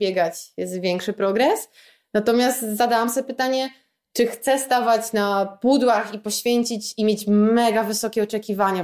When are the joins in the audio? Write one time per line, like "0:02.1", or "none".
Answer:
none